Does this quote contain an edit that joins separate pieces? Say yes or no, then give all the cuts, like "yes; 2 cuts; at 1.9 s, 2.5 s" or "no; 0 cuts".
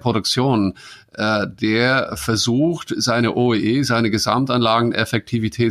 no; 0 cuts